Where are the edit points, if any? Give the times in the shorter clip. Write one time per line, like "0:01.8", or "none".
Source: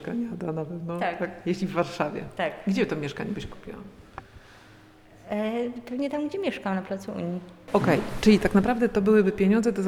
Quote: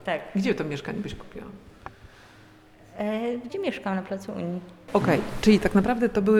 0:03.5